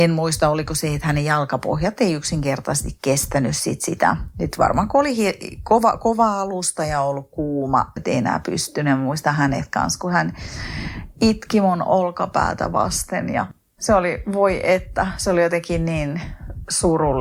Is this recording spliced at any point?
yes; 1 cut; at 8.0 s

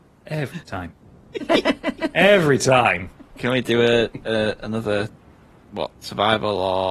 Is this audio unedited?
yes; 0 cuts

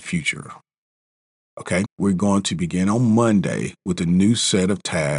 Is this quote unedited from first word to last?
no; 1 cut; at 1.8 s

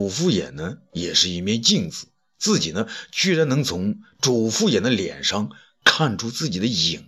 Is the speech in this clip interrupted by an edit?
no; 0 cuts

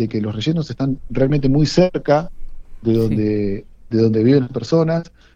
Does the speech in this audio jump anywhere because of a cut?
no; 0 cuts

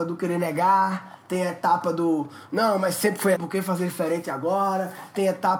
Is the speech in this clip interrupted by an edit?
yes; 1 cut; at 3.3 s

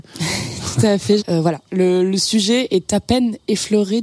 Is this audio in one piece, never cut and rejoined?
no; 1 cut; at 1.2 s

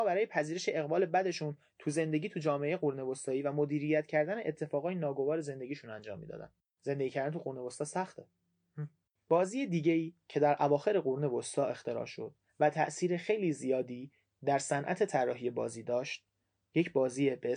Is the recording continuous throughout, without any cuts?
yes; 0 cuts

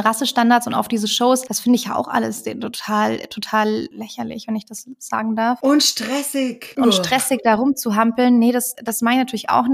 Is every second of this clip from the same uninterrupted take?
no; 1 cut; at 8.7 s

